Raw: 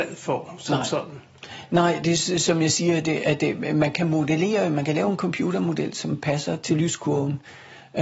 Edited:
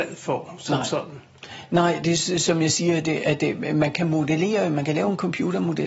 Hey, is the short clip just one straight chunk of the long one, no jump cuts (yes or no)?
yes